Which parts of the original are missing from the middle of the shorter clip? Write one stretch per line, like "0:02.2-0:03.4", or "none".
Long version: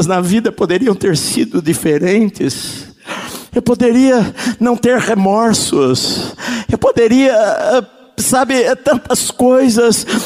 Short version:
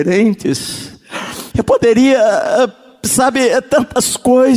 0:03.5-0:06.7